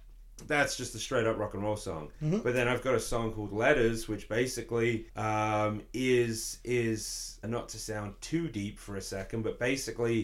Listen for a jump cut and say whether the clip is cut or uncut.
cut